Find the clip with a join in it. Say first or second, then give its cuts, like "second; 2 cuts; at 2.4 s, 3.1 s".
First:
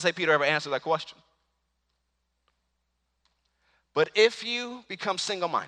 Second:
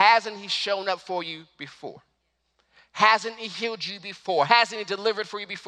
second; 1 cut; at 4.5 s